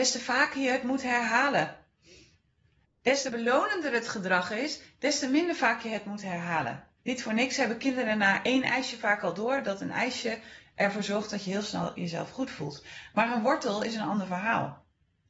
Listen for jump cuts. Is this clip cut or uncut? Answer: cut